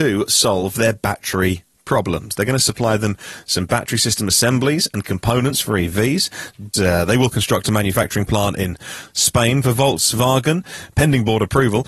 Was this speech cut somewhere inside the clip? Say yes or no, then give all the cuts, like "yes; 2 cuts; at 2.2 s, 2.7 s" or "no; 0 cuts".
yes; 1 cut; at 6.7 s